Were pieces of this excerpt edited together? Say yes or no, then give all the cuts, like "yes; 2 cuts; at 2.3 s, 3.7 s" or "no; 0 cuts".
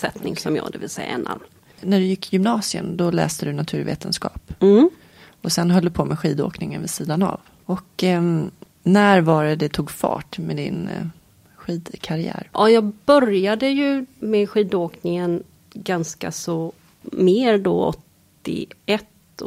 no; 0 cuts